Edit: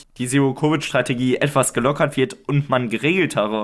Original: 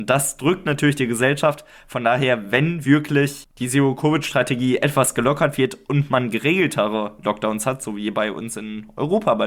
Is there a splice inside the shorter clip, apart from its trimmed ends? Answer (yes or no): no